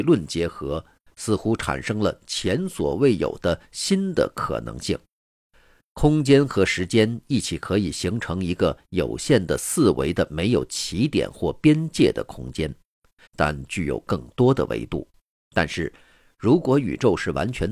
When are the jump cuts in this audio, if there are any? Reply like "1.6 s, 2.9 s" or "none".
13.3 s, 15.3 s